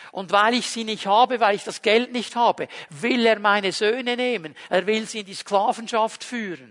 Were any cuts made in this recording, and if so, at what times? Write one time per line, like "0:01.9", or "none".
none